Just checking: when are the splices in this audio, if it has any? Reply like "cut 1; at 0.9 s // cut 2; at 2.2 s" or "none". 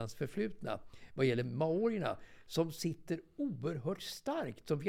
none